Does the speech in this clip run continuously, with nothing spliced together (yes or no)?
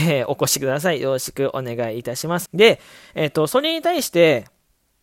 no